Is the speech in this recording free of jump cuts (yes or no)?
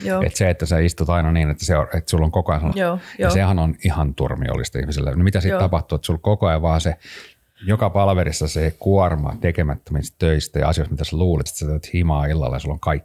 no